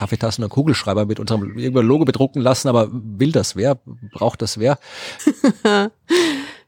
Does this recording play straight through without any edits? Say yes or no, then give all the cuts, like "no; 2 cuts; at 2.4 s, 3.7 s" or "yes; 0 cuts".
no; 1 cut; at 5.2 s